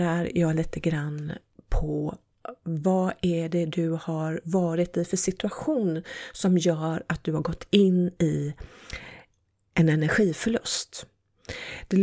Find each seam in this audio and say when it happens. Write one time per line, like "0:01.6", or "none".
none